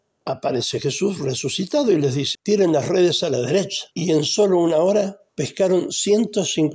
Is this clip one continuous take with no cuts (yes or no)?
no